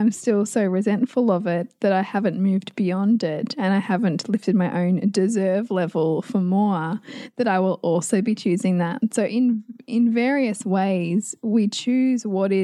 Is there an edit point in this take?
no; 0 cuts

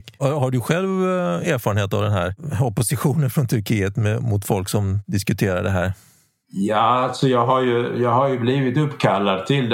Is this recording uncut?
yes; 0 cuts

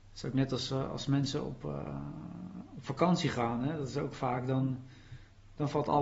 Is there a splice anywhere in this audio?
no; 0 cuts

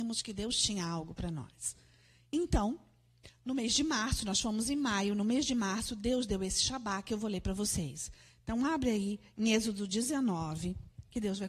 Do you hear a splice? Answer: no; 0 cuts

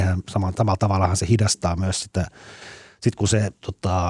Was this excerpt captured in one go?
yes; 0 cuts

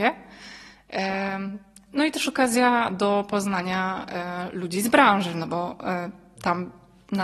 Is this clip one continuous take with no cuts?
yes; 0 cuts

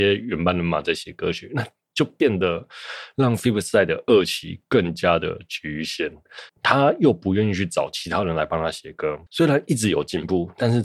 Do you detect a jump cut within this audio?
yes; 2 cuts; at 6.5 s, 9.3 s

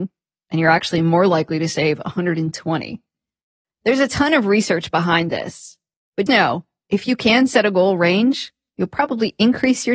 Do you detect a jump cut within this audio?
yes; 1 cut; at 6.3 s

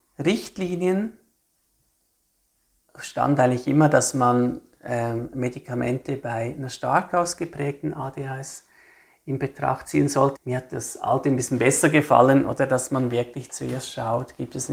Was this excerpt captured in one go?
no; 1 cut; at 10.4 s

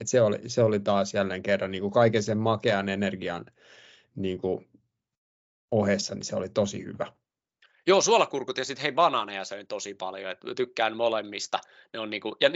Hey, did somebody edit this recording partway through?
no; 0 cuts

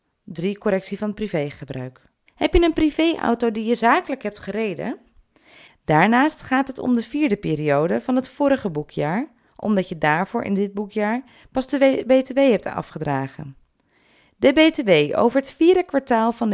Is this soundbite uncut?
no; 2 cuts; at 2.3 s, 5.7 s

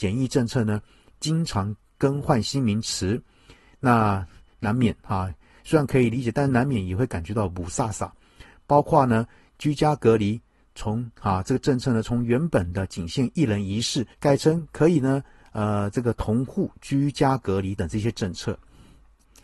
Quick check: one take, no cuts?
no; 2 cuts; at 14.1 s, 17.8 s

